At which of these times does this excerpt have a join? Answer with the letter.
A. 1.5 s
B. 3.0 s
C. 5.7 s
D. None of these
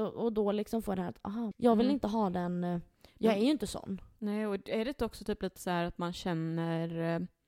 A